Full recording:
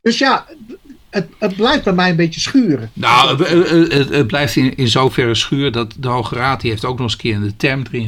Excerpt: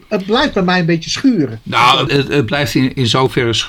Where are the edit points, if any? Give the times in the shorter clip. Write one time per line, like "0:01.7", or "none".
0:02.1

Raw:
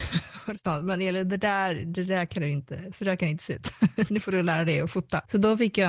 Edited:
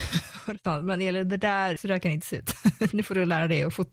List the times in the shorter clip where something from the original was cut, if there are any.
0:01.8

